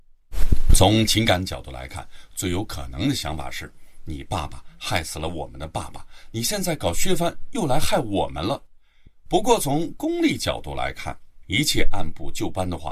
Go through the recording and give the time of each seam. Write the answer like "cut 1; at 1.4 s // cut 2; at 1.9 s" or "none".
cut 1; at 11.4 s